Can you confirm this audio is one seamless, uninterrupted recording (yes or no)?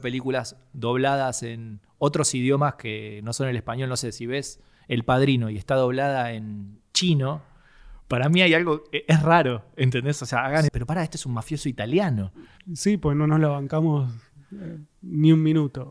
no